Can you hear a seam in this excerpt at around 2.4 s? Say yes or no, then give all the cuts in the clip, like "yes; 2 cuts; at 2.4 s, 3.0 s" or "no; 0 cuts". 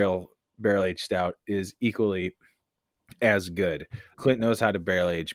no; 1 cut; at 4.1 s